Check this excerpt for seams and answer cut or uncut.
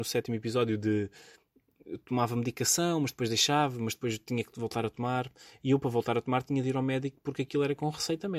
uncut